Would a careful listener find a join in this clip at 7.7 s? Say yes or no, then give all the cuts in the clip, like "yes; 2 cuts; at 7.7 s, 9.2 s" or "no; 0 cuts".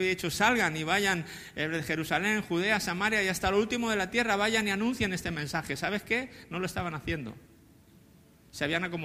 no; 0 cuts